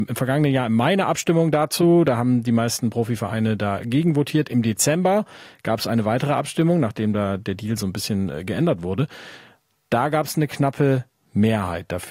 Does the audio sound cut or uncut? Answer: uncut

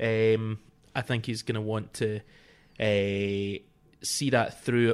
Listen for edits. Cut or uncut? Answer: uncut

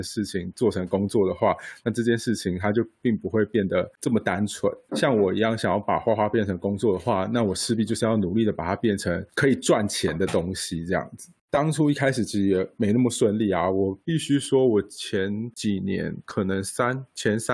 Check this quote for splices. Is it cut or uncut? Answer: uncut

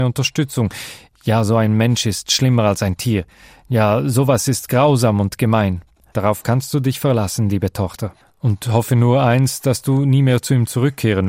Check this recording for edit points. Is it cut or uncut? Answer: cut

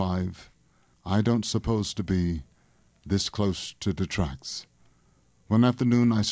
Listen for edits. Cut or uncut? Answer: cut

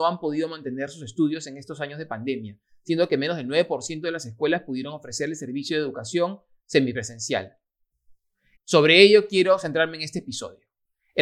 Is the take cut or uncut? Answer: cut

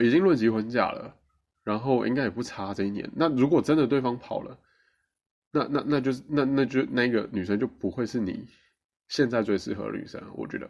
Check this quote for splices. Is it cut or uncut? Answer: uncut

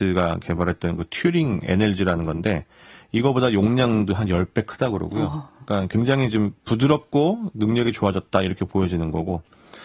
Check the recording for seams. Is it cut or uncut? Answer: uncut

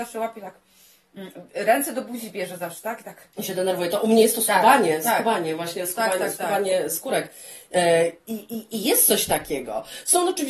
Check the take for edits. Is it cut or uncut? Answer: cut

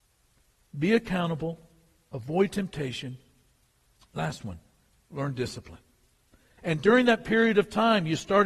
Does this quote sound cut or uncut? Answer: cut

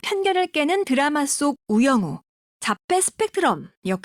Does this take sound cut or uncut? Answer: cut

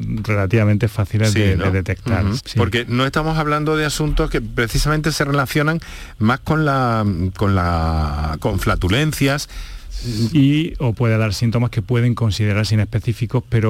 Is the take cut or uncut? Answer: cut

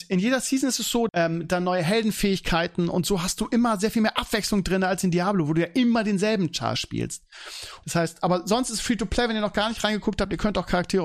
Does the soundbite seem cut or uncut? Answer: cut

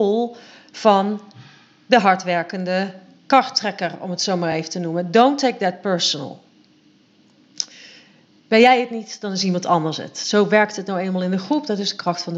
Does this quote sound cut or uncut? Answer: uncut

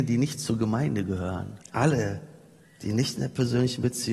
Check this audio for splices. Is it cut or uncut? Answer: cut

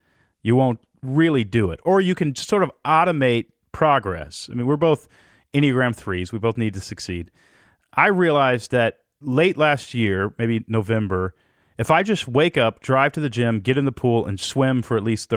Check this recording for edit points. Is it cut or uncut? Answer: uncut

